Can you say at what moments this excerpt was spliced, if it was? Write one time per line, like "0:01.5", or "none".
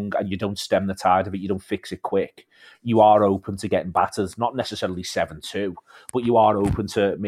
none

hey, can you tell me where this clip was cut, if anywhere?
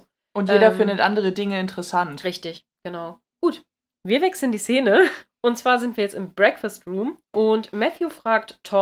none

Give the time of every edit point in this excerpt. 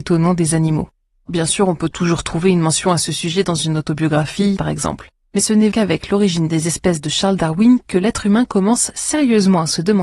0:04.6
0:05.7

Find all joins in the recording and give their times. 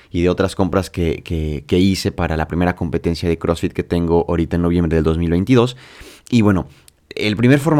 none

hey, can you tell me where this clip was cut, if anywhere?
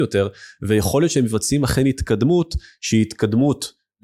none

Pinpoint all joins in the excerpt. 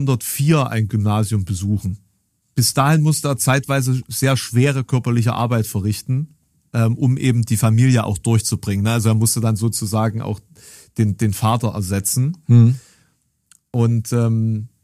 none

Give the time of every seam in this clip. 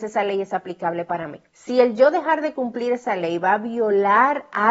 0:01.5

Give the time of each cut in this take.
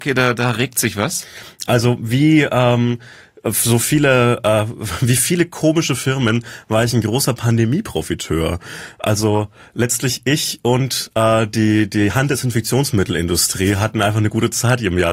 0:03.8

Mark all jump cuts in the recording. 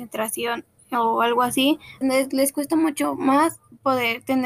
0:02.0

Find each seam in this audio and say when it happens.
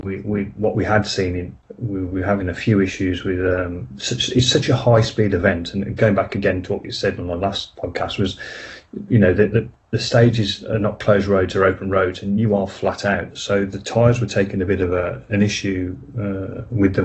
none

